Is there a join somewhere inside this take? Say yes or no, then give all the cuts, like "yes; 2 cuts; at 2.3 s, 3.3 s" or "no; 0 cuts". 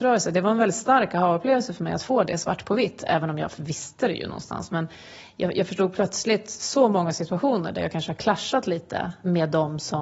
no; 0 cuts